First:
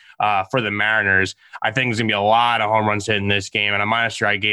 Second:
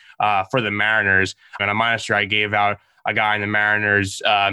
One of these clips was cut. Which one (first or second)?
second